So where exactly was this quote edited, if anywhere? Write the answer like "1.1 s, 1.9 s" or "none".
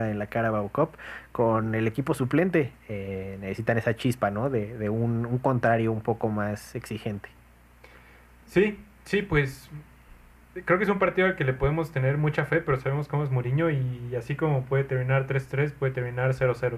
2.7 s